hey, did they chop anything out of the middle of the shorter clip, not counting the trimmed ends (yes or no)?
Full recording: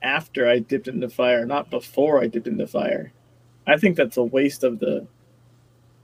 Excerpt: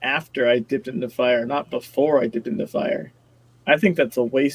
no